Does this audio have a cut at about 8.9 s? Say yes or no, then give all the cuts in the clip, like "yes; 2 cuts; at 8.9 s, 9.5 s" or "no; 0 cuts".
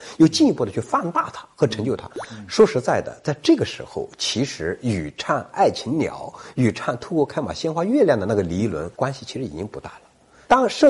yes; 1 cut; at 8.9 s